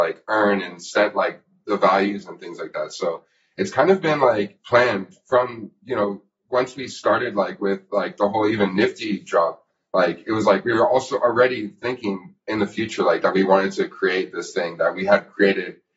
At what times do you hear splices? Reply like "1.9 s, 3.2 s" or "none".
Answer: none